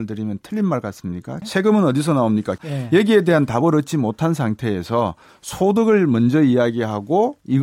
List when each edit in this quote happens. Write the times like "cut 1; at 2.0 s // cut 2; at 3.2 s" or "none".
cut 1; at 1.4 s // cut 2; at 2.6 s